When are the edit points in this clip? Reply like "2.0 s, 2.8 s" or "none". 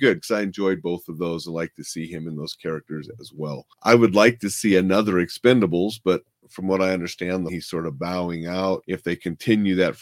7.5 s